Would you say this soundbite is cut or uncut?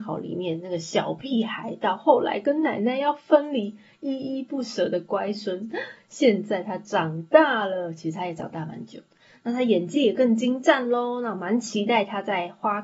uncut